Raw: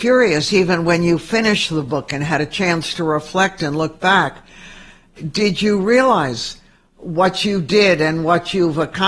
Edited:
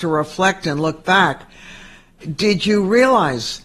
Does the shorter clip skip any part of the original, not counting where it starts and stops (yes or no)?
no